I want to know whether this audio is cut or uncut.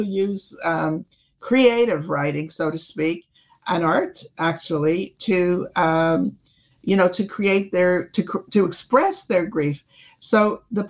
uncut